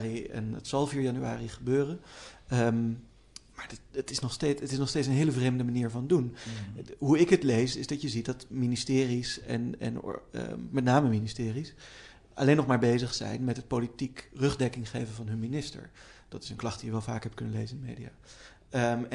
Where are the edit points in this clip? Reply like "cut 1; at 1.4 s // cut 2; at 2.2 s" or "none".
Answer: none